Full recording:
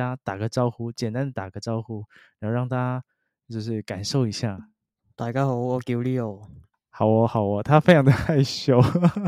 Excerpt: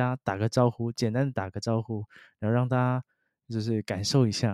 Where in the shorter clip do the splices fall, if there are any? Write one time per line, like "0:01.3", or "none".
none